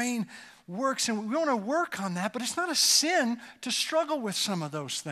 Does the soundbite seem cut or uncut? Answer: uncut